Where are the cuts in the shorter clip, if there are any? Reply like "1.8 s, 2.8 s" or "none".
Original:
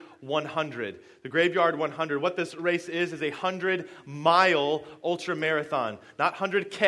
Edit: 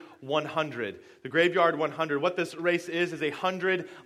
none